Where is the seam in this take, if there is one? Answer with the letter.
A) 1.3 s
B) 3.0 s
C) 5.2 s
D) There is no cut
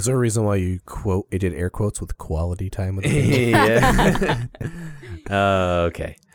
D